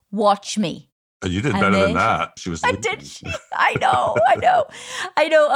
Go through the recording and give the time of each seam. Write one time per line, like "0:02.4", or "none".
0:02.4